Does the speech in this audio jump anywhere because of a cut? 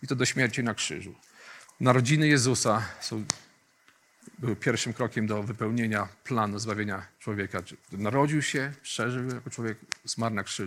yes; 2 cuts; at 1.7 s, 7.8 s

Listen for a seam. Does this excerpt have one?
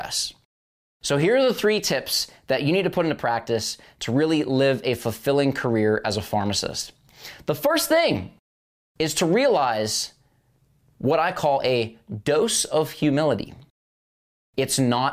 no; 0 cuts

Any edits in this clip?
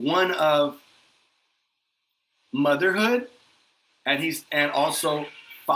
no; 0 cuts

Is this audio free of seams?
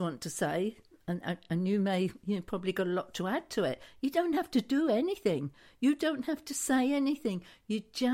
yes; 0 cuts

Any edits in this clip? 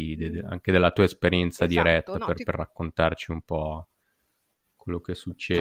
no; 0 cuts

